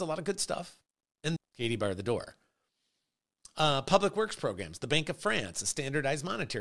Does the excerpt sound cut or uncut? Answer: cut